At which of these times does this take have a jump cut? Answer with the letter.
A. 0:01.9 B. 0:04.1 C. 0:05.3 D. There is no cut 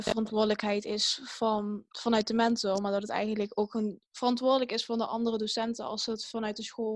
B